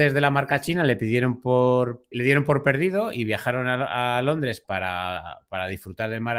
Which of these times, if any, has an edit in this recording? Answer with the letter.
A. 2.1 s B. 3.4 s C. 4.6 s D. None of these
A